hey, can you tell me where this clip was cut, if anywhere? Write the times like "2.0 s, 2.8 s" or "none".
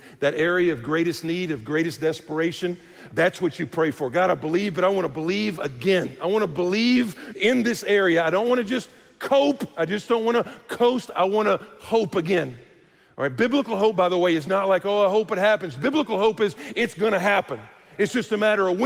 3.1 s